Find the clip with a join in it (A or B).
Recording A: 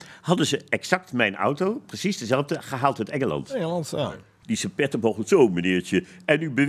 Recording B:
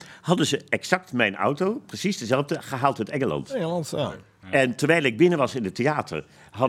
A